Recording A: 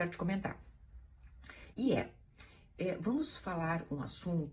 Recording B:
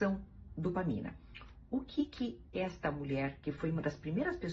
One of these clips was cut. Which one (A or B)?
A